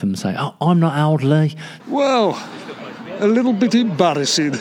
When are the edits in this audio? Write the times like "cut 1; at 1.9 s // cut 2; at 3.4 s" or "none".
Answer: cut 1; at 1.8 s